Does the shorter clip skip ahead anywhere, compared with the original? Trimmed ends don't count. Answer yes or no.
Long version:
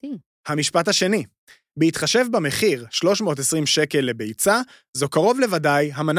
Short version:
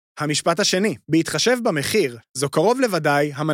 yes